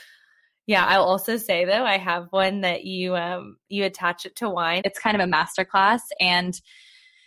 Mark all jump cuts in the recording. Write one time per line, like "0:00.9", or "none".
0:04.8